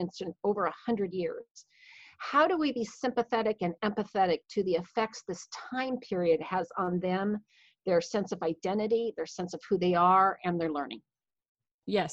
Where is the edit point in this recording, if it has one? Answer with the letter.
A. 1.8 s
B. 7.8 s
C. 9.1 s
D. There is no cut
D